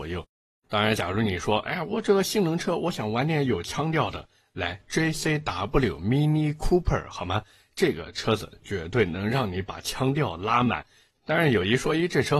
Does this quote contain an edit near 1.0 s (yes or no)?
no